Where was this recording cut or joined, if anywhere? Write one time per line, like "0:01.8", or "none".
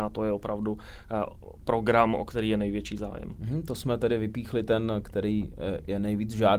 none

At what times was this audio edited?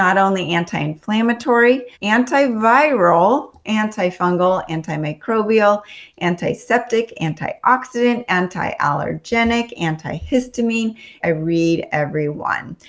0:01.9
0:11.2

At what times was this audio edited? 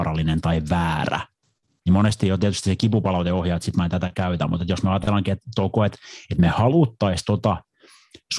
0:01.7

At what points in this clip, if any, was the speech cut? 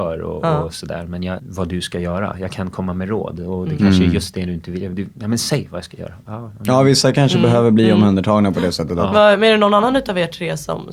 0:01.4

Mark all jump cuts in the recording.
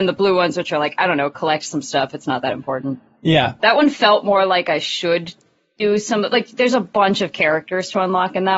0:03.6

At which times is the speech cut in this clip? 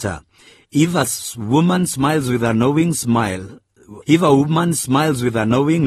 0:04.0

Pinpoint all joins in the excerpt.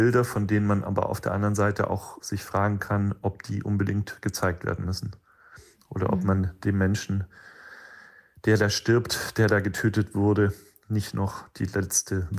none

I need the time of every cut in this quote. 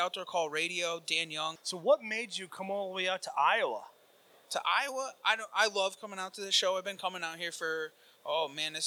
0:01.6

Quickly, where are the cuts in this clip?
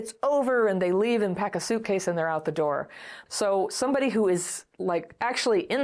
0:03.3

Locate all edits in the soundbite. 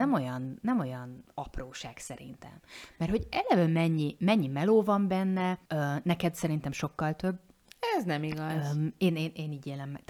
0:05.7

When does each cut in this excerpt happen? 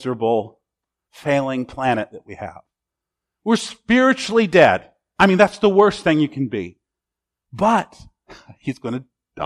none

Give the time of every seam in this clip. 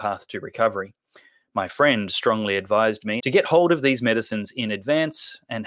0:03.2

